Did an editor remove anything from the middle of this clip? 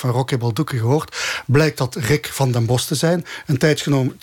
no; 0 cuts

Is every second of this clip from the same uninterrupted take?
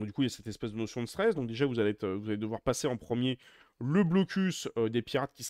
no; 1 cut; at 1.3 s

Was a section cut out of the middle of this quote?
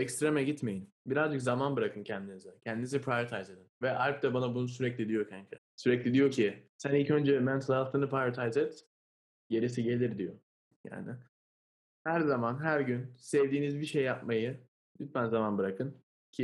yes; 3 cuts; at 1.0 s, 5.6 s, 10.7 s

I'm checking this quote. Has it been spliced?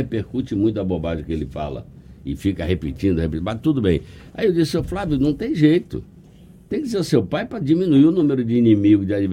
no; 0 cuts

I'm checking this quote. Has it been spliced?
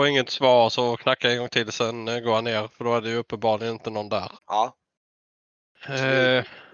yes; 1 cut; at 4.4 s

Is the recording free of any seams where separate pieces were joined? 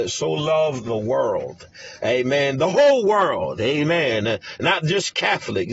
yes; 0 cuts

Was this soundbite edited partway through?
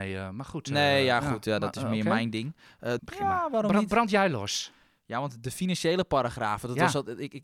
yes; 1 cut; at 3.0 s

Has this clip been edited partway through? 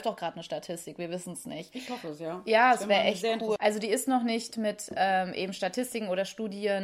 yes; 1 cut; at 3.6 s

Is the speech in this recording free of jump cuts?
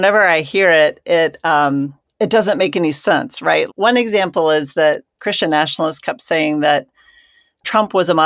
no; 1 cut; at 3.7 s

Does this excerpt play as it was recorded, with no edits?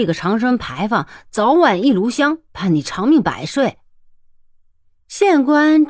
yes; 0 cuts

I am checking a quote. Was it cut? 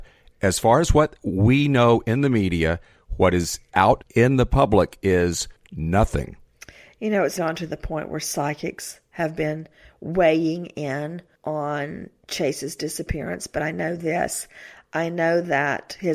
yes; 1 cut; at 7.4 s

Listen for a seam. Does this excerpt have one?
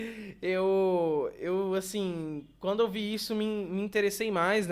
no; 0 cuts

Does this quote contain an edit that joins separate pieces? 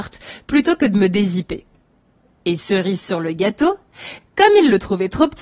no; 0 cuts

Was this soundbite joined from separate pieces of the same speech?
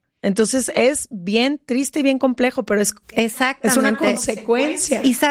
yes; 1 cut; at 3.0 s

